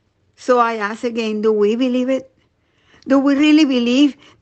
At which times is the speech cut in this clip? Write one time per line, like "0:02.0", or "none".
none